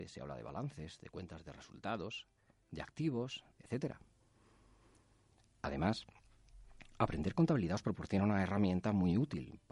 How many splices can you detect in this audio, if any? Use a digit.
1